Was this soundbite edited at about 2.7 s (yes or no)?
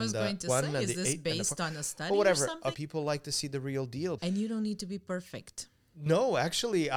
yes